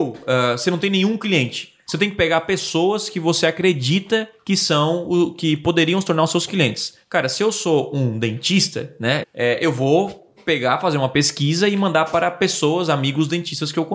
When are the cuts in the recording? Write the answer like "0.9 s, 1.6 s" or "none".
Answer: 9.2 s